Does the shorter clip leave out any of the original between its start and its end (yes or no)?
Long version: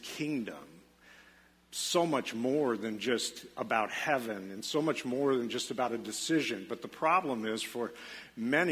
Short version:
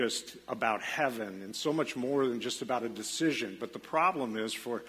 no